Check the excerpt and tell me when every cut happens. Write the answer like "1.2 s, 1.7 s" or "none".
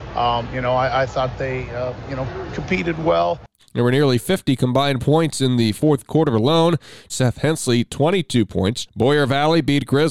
3.6 s, 7.1 s, 8.9 s